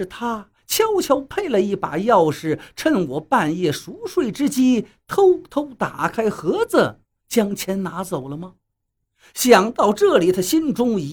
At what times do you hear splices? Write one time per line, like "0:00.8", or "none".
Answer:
none